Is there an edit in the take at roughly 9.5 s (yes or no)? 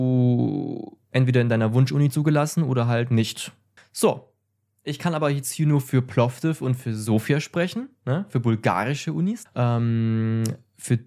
yes